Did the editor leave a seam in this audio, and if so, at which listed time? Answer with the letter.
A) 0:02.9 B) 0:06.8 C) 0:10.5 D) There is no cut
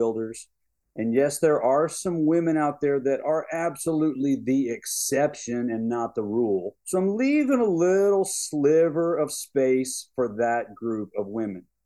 B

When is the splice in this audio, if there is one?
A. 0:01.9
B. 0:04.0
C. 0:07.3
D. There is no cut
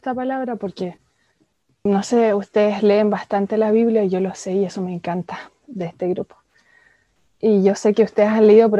A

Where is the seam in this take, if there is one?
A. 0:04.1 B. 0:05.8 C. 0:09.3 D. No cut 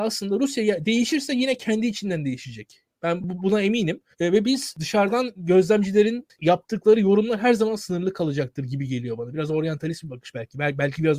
A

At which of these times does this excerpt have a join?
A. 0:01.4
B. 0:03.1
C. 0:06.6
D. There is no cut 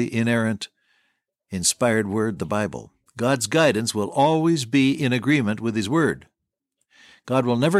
D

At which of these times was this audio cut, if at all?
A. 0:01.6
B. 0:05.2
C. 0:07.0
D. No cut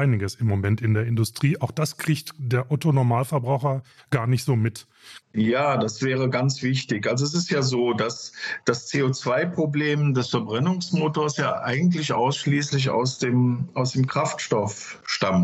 B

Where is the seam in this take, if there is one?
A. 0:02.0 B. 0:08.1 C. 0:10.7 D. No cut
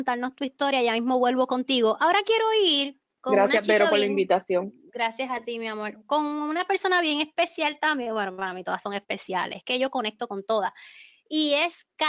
D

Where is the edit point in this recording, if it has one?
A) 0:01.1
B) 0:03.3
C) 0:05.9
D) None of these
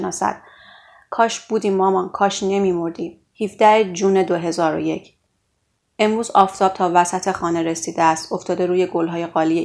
B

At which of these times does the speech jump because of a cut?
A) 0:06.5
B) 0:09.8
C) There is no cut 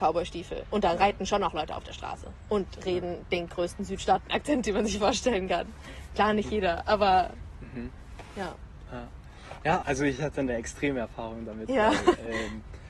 B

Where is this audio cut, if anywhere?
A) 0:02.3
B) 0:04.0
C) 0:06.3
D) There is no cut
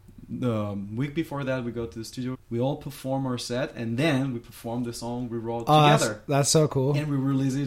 A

